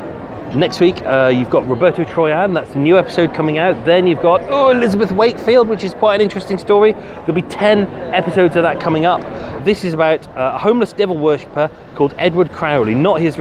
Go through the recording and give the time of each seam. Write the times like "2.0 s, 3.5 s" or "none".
9.6 s